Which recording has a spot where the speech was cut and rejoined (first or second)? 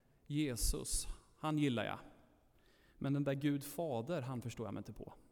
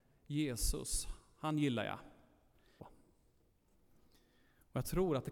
second